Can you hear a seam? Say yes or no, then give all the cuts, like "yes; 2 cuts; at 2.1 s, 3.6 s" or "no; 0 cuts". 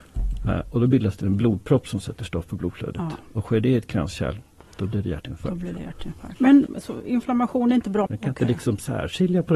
yes; 2 cuts; at 6.7 s, 8.1 s